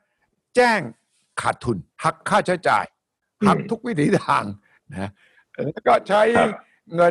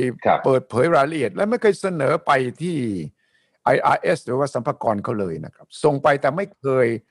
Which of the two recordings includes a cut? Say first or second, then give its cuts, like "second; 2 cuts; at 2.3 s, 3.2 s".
first; 1 cut; at 1.9 s